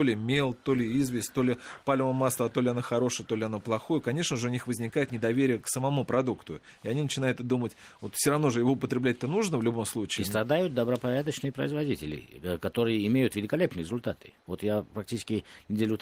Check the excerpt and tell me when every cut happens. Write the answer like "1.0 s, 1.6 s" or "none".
none